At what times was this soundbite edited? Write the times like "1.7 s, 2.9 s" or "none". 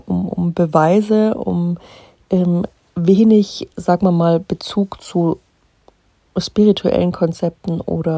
none